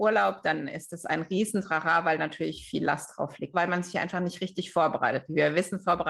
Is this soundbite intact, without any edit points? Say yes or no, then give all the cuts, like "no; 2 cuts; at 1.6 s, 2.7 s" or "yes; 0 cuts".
no; 1 cut; at 3.5 s